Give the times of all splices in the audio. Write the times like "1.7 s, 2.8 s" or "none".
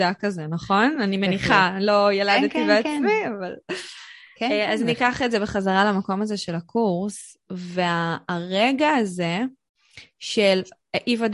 none